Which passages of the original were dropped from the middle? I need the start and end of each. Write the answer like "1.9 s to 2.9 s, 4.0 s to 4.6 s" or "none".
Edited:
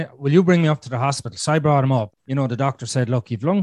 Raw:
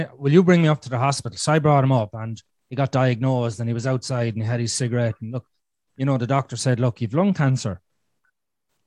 2.1 s to 5.8 s